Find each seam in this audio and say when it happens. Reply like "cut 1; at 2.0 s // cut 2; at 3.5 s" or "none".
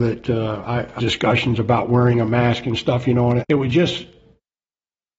cut 1; at 1.0 s // cut 2; at 3.4 s